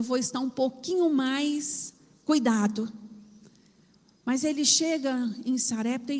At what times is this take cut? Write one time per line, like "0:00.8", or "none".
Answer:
none